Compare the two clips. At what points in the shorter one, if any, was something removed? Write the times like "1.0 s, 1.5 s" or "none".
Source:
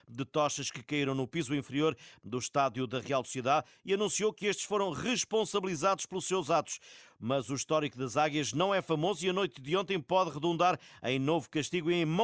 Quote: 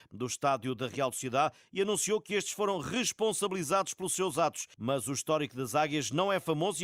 4.7 s